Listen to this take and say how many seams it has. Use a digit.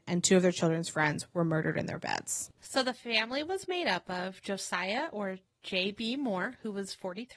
1